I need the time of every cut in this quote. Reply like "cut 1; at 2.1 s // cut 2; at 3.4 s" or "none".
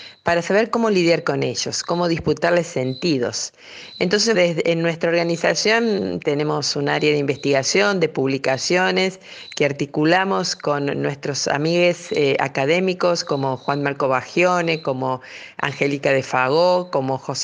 cut 1; at 4.3 s